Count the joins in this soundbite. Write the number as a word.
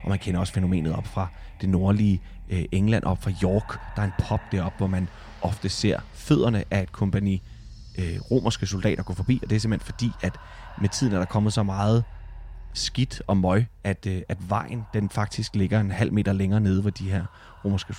zero